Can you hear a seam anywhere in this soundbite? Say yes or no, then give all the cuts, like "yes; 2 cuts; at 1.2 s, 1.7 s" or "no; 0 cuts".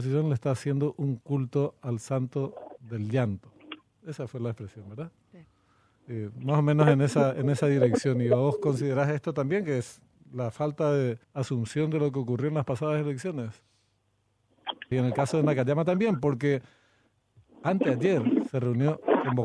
yes; 2 cuts; at 11.2 s, 14.9 s